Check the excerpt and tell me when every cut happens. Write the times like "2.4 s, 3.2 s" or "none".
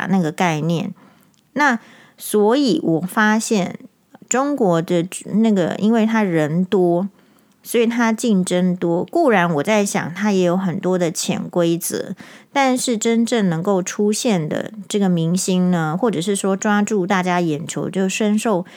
none